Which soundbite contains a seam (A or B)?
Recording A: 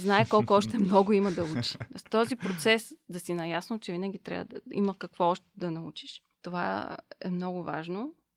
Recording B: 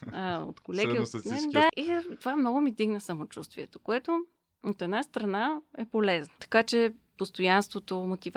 B